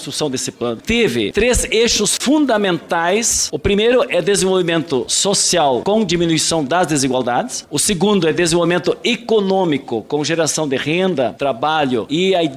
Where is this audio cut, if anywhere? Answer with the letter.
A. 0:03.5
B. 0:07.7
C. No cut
C